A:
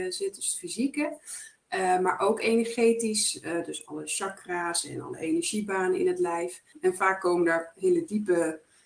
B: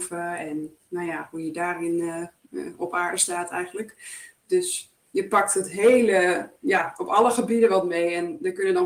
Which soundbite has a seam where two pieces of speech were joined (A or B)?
A